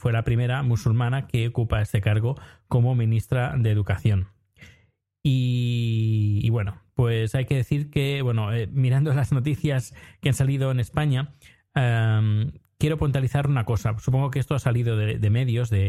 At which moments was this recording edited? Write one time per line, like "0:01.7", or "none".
none